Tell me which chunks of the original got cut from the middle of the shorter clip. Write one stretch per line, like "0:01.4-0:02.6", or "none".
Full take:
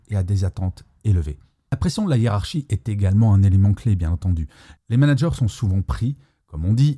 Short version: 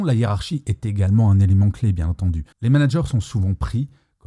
0:04.5-0:04.8